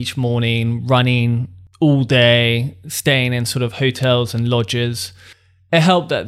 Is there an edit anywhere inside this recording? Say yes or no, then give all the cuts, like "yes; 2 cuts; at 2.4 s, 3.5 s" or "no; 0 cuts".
no; 0 cuts